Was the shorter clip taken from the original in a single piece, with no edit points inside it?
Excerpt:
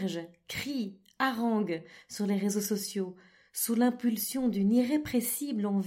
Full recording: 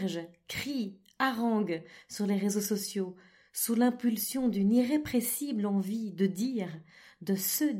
yes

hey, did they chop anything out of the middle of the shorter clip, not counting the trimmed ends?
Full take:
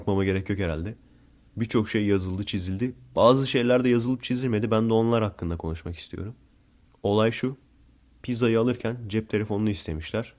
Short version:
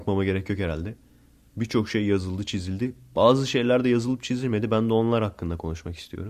no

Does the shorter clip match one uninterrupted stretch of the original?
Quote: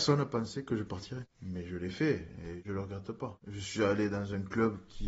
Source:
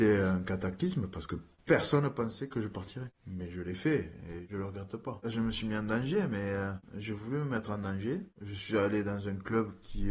no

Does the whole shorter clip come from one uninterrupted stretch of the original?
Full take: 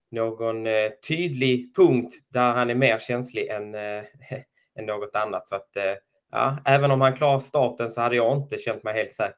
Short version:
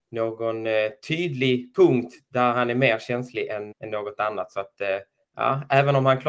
no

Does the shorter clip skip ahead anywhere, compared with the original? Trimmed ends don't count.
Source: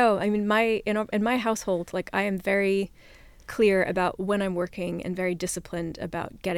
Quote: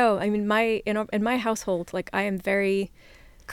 no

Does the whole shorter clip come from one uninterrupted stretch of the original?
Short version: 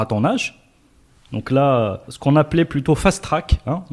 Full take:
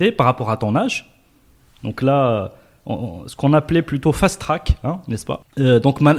no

